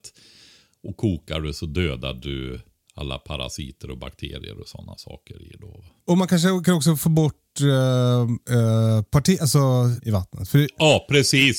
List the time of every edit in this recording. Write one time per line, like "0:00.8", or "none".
0:10.0